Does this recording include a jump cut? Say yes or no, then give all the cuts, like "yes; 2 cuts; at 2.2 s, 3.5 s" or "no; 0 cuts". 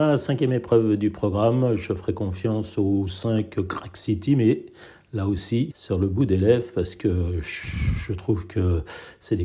yes; 1 cut; at 5.7 s